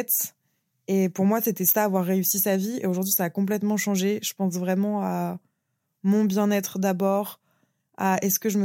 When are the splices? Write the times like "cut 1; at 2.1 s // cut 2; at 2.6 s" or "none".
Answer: none